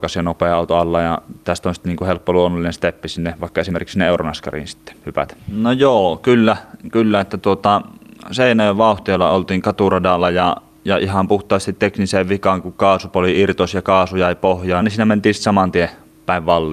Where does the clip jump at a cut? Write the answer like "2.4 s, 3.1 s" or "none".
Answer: 5.4 s, 14.8 s

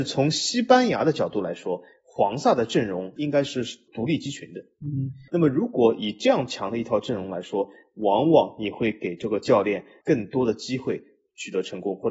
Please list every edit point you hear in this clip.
none

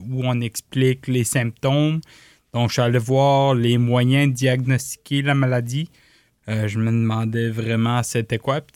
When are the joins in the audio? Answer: 6.4 s

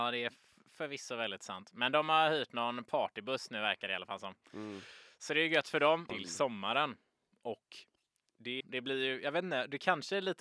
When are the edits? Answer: 6.1 s, 8.6 s

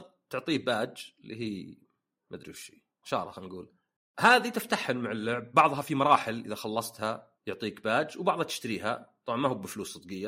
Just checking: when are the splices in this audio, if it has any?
3.0 s, 7.4 s

